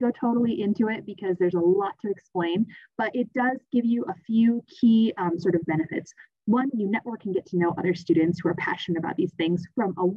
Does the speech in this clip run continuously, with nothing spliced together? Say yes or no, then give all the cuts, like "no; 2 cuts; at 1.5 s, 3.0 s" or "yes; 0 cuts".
yes; 0 cuts